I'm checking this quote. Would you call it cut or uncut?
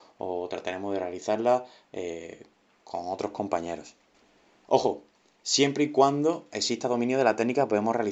cut